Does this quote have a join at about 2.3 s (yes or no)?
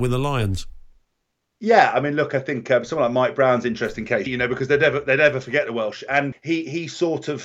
no